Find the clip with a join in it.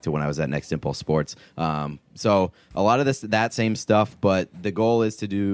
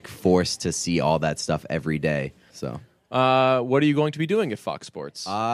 second; 1 cut; at 2.5 s

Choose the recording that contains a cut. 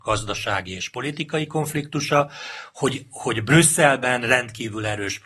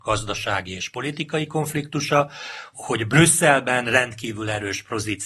second; 1 cut; at 2.7 s

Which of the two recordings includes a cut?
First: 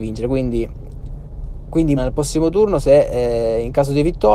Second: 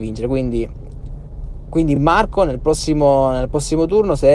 first; 1 cut; at 2.0 s

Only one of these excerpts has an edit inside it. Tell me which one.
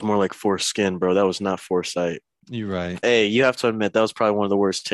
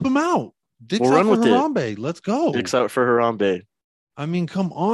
first; 1 cut; at 3.0 s

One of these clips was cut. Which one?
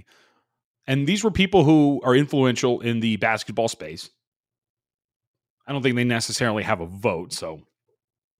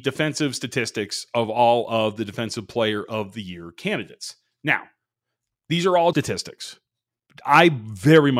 second; 1 cut; at 6.1 s

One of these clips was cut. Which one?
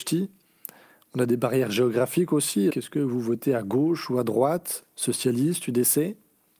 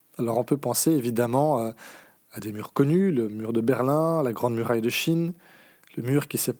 first; 1 cut; at 2.7 s

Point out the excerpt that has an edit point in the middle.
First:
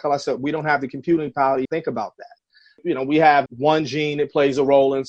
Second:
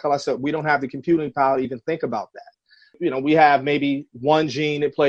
first; 2 cuts; at 1.6 s, 3.5 s

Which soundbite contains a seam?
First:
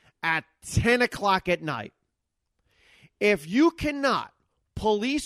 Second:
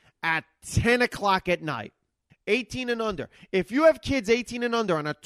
second; 1 cut; at 2.3 s

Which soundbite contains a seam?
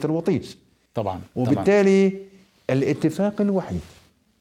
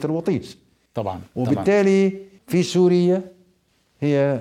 second; 1 cut; at 2.4 s

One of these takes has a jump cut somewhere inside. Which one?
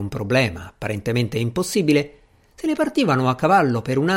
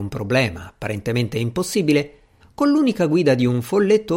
second; 1 cut; at 2.4 s

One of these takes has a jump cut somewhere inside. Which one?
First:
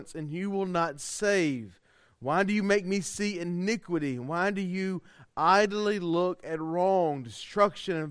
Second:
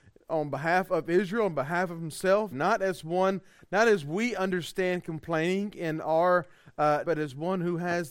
second; 2 cuts; at 2.5 s, 7.0 s

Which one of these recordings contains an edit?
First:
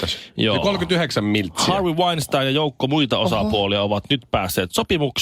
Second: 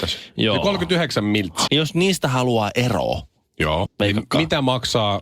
second; 2 cuts; at 1.7 s, 3.9 s

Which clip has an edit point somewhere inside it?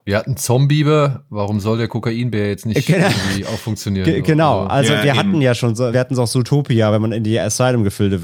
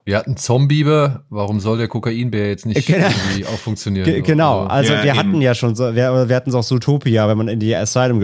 first; 1 cut; at 5.9 s

